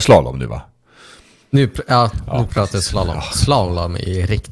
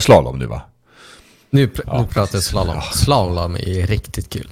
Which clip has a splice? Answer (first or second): second